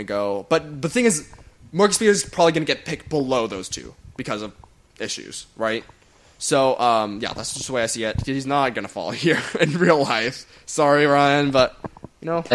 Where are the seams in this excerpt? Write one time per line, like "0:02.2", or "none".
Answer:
none